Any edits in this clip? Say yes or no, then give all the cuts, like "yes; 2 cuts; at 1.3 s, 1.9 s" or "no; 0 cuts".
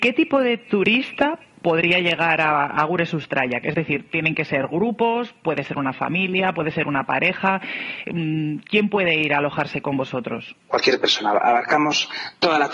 yes; 1 cut; at 10.6 s